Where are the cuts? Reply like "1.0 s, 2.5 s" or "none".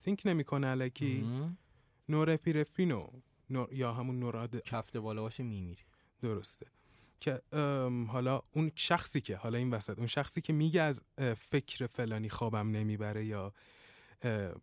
4.7 s

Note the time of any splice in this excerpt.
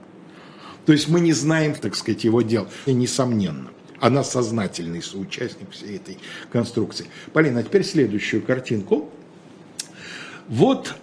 1.8 s, 2.9 s

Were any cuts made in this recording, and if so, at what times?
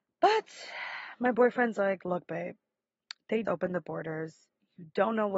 3.4 s

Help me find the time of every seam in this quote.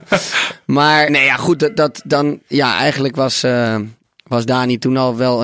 1.1 s

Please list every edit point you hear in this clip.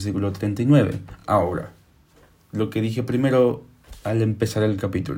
none

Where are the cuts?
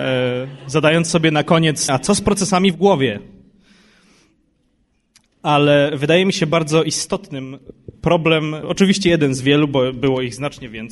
1.9 s

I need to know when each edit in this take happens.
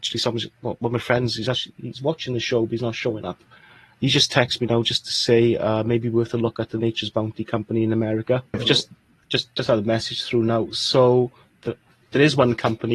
8.5 s

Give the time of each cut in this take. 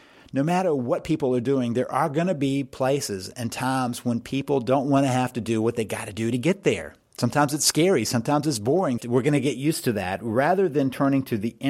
9.0 s

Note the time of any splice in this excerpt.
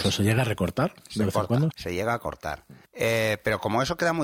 1.7 s, 2.8 s

